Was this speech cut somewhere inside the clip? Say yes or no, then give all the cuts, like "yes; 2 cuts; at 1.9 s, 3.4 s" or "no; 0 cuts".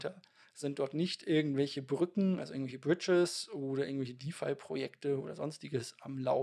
no; 0 cuts